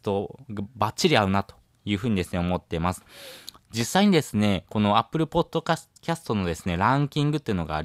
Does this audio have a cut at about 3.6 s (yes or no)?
no